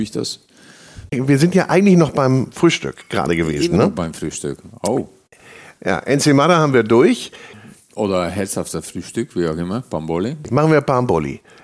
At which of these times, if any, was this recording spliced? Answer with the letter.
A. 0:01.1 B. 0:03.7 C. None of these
A